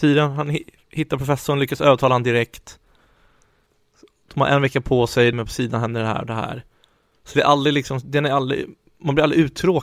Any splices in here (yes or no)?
yes